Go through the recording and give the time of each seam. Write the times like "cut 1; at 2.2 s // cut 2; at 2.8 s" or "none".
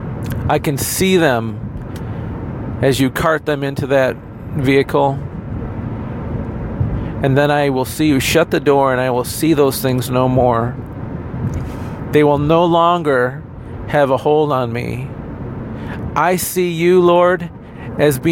none